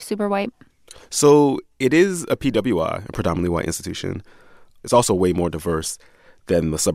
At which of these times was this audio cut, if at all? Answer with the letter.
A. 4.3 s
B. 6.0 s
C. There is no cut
C